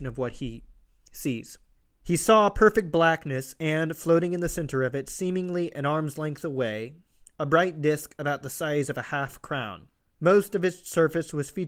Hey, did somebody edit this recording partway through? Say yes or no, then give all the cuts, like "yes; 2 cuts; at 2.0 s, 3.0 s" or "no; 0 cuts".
no; 0 cuts